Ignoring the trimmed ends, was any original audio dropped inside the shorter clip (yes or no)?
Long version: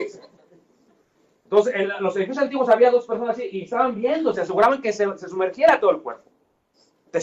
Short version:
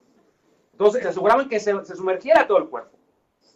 yes